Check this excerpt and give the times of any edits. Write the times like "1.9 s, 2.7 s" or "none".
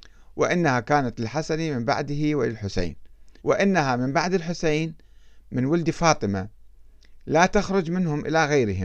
3.4 s